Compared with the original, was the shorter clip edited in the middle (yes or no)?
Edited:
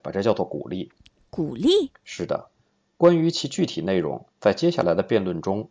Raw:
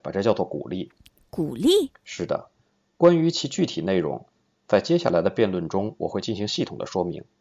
yes